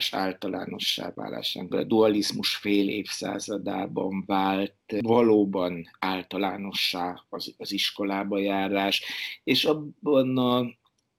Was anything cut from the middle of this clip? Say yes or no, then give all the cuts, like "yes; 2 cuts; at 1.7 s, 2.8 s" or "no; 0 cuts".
yes; 1 cut; at 1.7 s